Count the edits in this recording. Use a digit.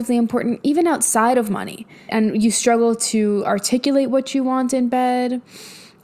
1